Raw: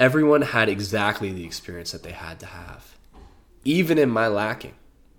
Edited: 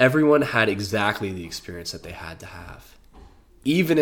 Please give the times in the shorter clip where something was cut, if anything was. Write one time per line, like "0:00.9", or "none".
none